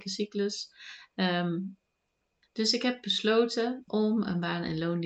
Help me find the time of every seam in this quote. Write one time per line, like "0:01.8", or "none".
0:01.1
0:03.9